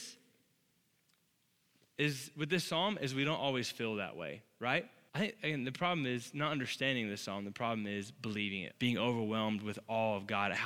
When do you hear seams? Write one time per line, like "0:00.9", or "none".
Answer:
0:05.1
0:08.7